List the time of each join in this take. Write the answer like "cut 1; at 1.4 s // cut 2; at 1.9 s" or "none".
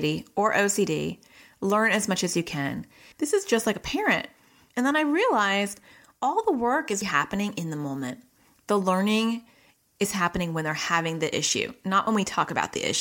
cut 1; at 3.1 s // cut 2; at 4.7 s // cut 3; at 7.0 s